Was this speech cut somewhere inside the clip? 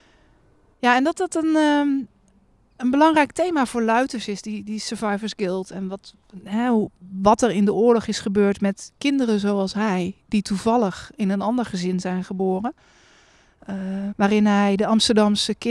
yes; 1 cut; at 14.1 s

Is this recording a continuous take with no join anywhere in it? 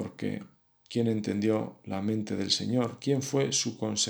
yes; 0 cuts

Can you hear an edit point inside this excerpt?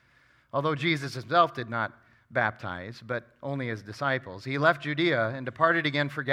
no; 0 cuts

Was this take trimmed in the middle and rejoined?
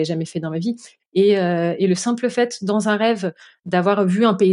yes; 1 cut; at 1.0 s

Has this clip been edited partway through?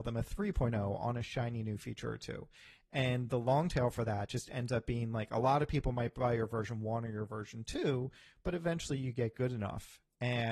no; 0 cuts

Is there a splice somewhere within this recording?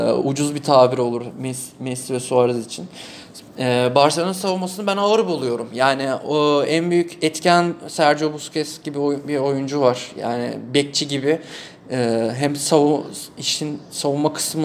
no; 0 cuts

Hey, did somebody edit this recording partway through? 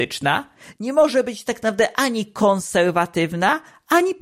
no; 0 cuts

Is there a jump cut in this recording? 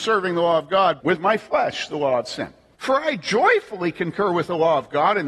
yes; 2 cuts; at 1.0 s, 2.7 s

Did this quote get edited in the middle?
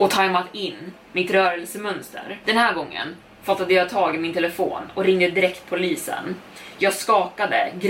yes; 1 cut; at 1.0 s

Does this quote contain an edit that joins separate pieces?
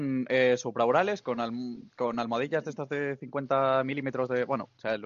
no; 0 cuts

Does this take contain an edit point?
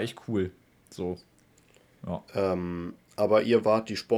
no; 0 cuts

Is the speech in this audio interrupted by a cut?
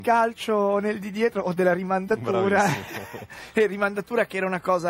no; 0 cuts

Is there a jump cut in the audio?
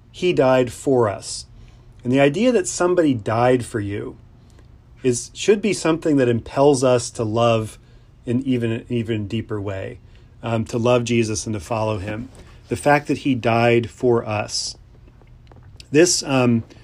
no; 0 cuts

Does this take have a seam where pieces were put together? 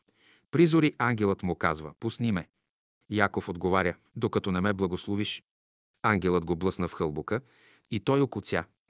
yes; 1 cut; at 4.1 s

